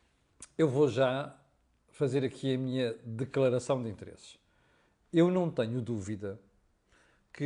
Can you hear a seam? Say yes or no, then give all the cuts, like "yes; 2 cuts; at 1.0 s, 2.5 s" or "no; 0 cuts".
no; 0 cuts